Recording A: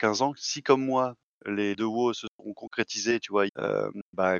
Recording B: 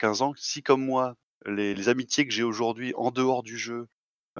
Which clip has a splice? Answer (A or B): A